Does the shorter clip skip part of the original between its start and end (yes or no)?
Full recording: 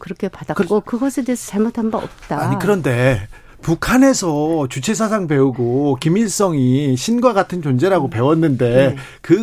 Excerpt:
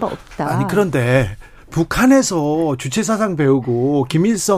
no